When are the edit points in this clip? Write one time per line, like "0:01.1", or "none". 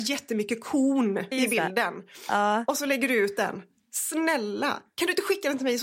0:01.3